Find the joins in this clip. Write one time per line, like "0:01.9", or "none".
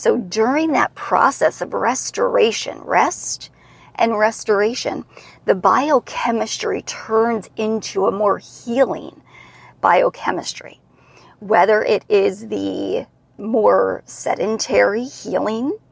none